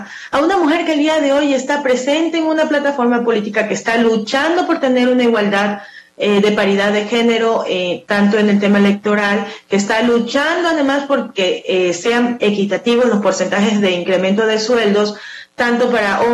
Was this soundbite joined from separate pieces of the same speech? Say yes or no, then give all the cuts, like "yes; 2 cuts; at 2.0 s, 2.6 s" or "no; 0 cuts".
no; 0 cuts